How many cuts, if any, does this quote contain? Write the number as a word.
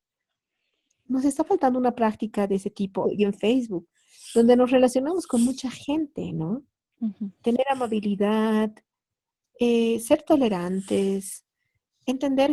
one